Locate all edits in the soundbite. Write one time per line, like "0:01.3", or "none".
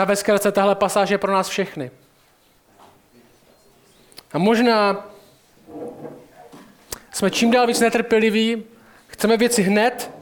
none